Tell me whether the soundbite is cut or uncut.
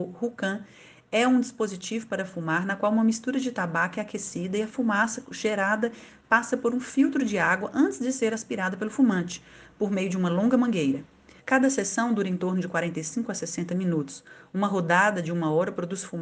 cut